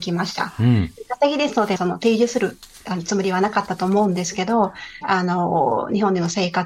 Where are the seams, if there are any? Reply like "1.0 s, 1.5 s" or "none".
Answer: 1.8 s, 5.0 s

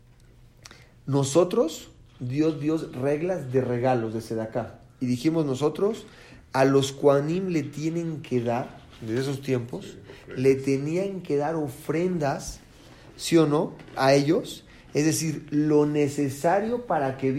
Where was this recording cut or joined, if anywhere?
none

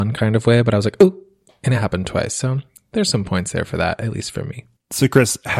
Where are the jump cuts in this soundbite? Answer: none

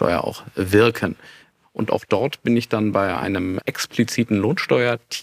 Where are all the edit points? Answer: 1.6 s, 3.6 s

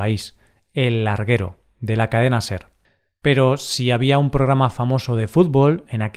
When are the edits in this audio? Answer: none

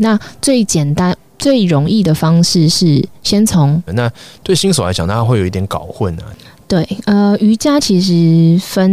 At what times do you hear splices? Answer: 3.9 s

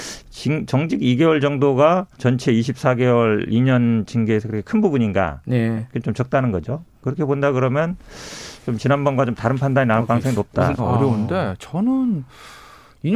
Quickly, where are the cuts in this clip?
2.1 s, 10.8 s

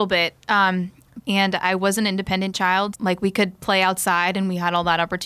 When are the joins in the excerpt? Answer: 1.2 s, 2.9 s

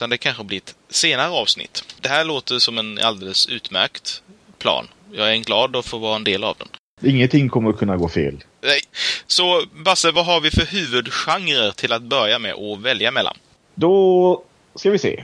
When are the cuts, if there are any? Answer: 2.0 s

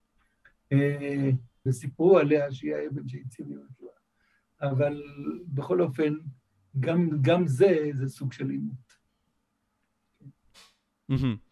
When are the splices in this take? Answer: 1.7 s

